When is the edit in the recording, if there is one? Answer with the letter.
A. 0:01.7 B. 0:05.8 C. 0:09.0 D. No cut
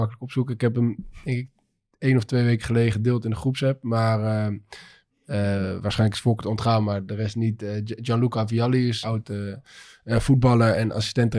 C